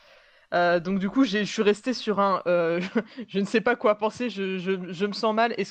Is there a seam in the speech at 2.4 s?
no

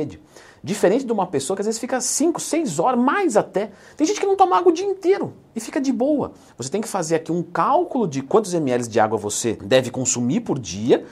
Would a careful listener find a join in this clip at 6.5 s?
yes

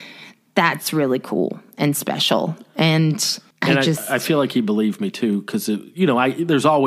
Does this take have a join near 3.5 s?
yes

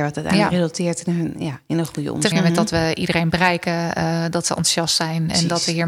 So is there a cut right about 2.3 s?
yes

